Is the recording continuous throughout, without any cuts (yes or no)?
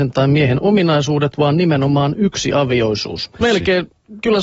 no